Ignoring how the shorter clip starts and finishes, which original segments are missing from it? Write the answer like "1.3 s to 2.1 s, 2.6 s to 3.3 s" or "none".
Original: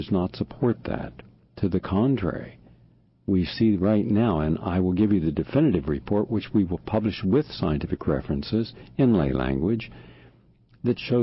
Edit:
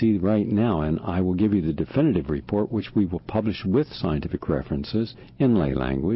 none